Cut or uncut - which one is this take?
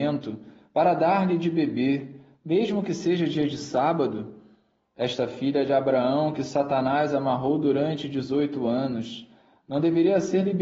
uncut